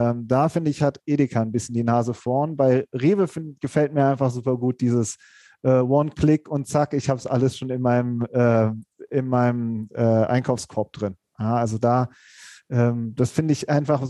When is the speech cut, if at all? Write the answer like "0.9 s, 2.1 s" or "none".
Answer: none